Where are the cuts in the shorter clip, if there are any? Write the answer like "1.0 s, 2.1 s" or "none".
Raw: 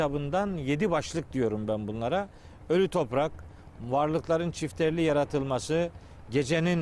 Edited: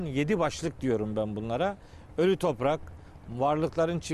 none